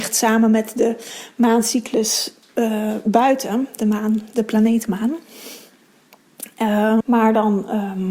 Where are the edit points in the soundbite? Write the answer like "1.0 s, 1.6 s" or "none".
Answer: 7.0 s